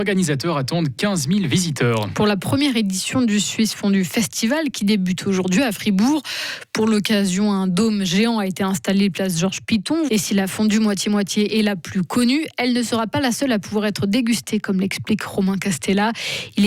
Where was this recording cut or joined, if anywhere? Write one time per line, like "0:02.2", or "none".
0:10.1